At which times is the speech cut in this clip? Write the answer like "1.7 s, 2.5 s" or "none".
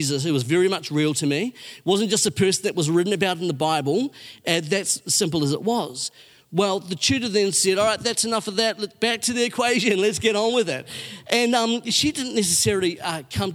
none